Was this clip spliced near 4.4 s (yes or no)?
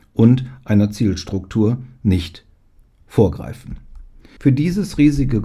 yes